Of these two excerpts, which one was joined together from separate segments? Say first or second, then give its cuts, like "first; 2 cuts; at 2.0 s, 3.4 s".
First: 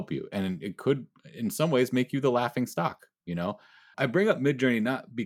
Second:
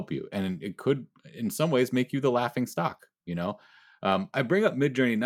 first; 1 cut; at 3.9 s